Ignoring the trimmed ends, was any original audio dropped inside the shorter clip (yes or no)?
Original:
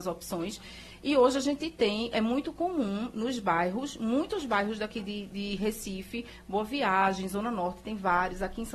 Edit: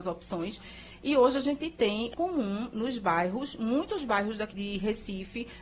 yes